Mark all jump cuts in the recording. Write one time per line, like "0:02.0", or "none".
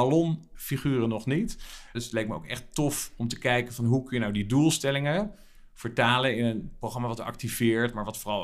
0:01.9